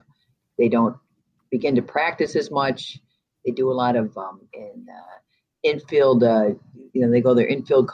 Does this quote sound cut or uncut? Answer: cut